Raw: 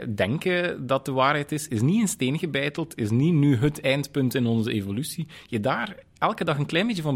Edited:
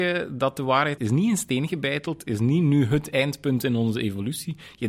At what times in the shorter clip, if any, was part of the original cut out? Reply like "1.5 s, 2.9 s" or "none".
1.0 s